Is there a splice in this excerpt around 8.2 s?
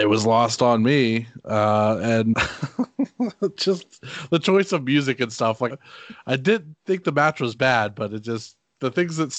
no; 2 cuts; at 2.3 s, 5.7 s

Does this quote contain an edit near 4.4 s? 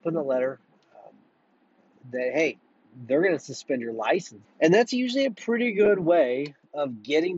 yes; 1 cut; at 4.4 s

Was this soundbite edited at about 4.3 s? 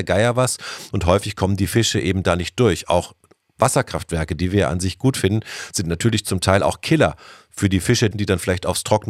no; 1 cut; at 8.1 s

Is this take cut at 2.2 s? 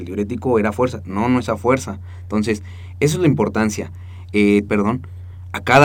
no; 1 cut; at 4.7 s

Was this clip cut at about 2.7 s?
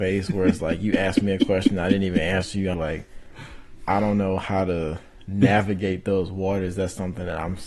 yes; 1 cut; at 2.7 s

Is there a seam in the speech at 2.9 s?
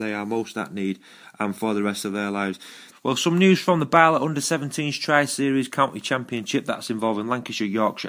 yes; 1 cut; at 2.9 s

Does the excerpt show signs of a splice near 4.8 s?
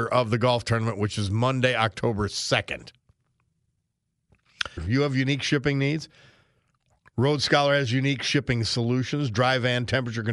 yes; 1 cut; at 4.8 s

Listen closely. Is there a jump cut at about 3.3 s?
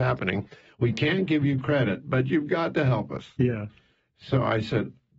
no; 0 cuts

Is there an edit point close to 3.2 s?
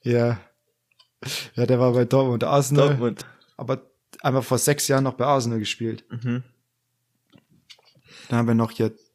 yes; 1 cut; at 3.2 s

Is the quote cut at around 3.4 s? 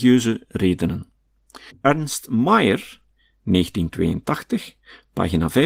no; 1 cut; at 1.7 s

